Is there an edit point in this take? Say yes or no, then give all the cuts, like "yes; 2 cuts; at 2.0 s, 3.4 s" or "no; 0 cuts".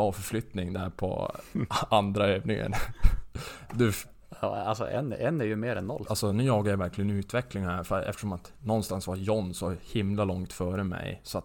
yes; 1 cut; at 6.1 s